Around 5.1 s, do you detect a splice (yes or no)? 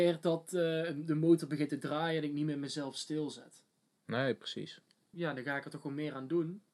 yes